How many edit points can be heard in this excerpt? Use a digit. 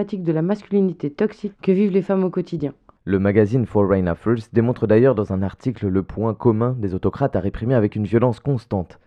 1